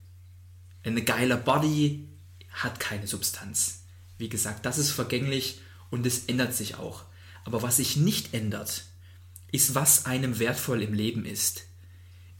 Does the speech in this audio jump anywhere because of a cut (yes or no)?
no